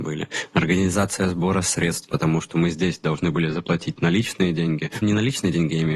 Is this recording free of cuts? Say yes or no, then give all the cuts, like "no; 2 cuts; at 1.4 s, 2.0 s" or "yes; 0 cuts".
no; 1 cut; at 5.0 s